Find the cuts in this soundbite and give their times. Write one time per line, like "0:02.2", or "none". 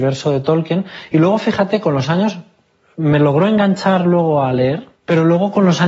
none

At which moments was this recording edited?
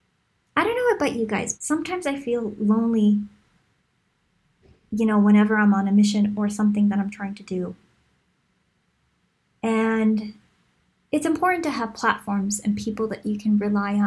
0:01.5

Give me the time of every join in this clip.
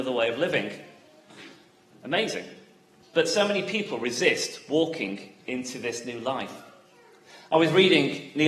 0:03.0

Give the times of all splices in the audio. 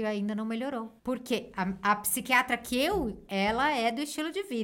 0:01.0
0:03.3

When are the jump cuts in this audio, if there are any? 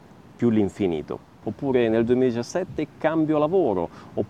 0:01.4

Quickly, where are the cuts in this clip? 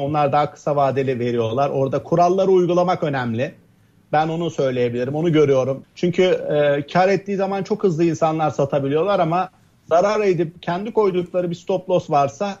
0:05.8

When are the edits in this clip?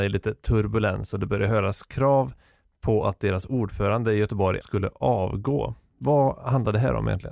0:04.6

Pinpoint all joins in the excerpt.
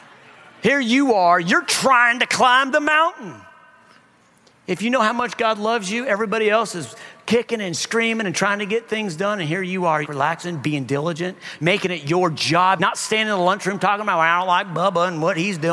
0:10.0
0:11.6
0:12.8

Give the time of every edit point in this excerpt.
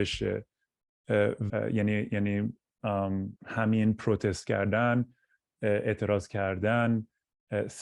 0:01.5
0:03.4

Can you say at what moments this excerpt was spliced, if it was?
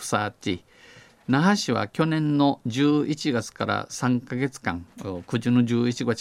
0:01.2

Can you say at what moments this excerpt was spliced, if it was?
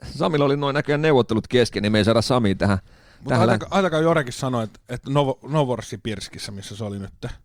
none

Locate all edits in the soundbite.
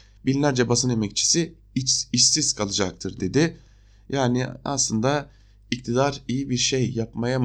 none

